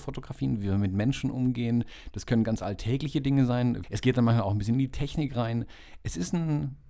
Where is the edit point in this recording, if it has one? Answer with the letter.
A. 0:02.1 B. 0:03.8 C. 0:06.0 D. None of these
B